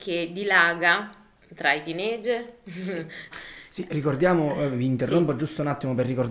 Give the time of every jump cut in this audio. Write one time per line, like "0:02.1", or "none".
0:03.3